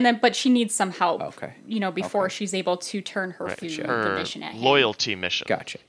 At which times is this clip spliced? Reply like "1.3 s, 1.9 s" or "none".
3.6 s